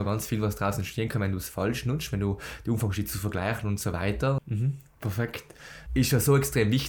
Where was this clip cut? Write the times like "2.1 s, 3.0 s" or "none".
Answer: 4.4 s, 5.9 s

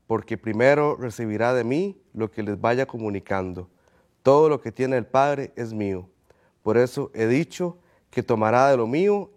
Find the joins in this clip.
none

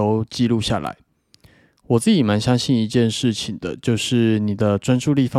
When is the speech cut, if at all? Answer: none

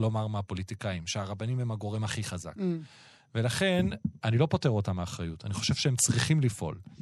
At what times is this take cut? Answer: none

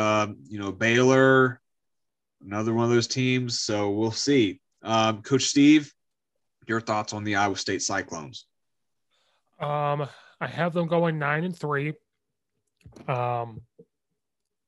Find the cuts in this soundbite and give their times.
none

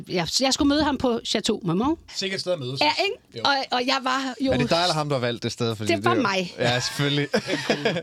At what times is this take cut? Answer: 2.1 s

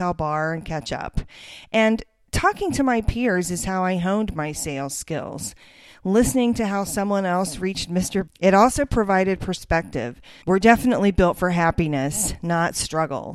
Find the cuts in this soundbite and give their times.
8.3 s, 10.4 s

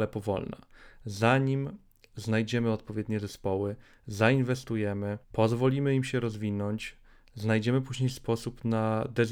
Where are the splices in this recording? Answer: 5.2 s

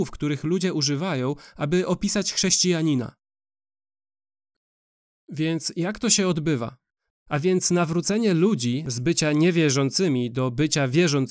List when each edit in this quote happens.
none

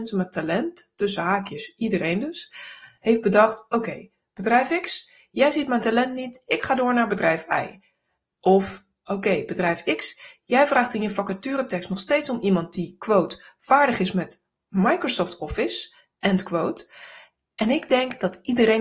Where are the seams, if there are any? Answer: none

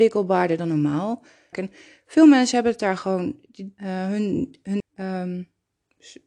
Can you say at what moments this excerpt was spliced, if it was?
1.5 s, 3.8 s, 4.8 s

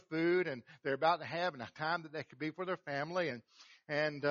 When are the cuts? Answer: none

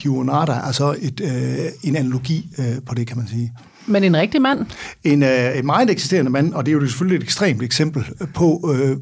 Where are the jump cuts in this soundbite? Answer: none

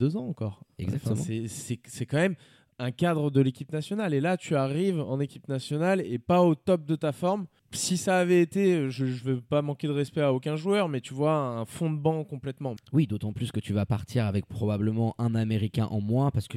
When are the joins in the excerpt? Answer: 12.8 s

